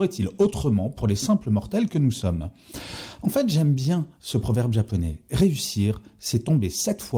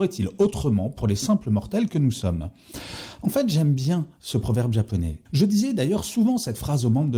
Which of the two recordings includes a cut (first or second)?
second